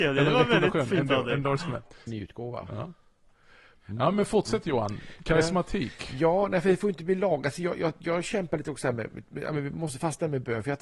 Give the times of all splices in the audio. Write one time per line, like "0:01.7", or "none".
0:02.1